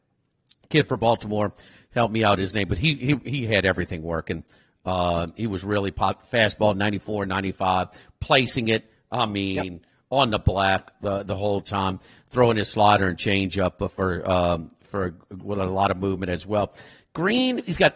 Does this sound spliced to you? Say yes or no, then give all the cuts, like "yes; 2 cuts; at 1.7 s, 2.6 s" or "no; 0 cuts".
no; 0 cuts